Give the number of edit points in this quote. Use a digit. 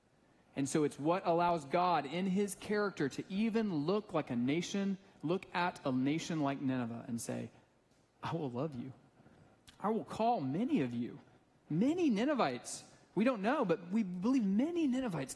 1